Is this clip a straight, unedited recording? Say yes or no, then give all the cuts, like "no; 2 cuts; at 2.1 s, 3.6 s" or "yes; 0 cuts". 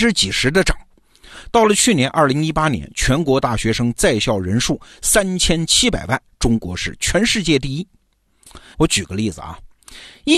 no; 1 cut; at 8.7 s